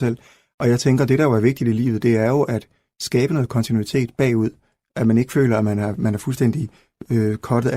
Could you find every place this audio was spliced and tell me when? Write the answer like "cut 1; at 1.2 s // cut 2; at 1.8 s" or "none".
none